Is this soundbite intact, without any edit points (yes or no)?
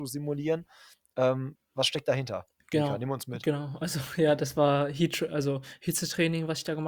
no